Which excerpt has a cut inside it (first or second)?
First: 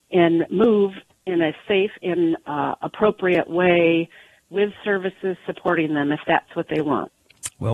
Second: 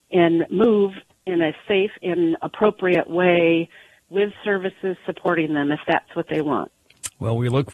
second